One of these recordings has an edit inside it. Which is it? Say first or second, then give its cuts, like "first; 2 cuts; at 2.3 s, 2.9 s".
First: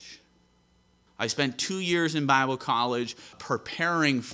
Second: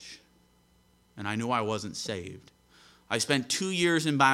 first; 2 cuts; at 1.1 s, 3.3 s